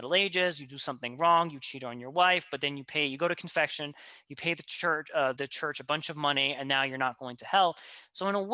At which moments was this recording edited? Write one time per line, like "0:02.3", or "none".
0:05.4